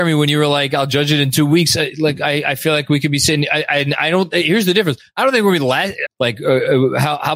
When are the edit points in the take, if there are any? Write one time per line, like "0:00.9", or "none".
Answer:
0:06.1